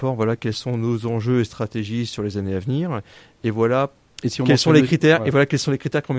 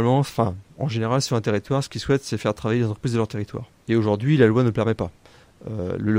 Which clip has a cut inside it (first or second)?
second